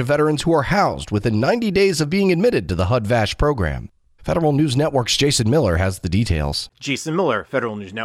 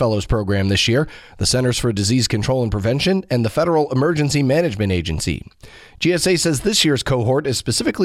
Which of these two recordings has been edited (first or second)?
first